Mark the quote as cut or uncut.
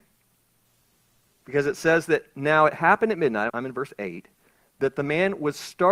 cut